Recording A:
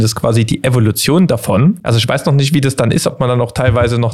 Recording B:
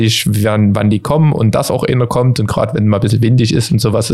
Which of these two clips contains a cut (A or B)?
A